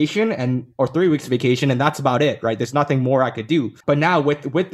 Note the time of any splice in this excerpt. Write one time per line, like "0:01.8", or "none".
0:03.8